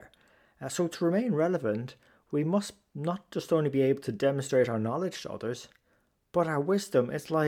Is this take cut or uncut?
uncut